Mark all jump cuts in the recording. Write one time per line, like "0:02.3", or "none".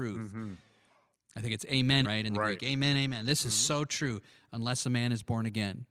0:02.0